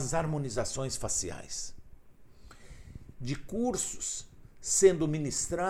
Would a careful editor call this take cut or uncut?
cut